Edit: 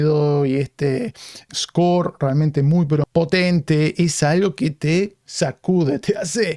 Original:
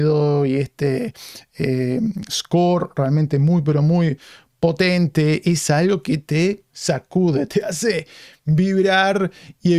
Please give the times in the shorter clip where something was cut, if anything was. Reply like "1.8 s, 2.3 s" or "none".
1.5 s, 3.0 s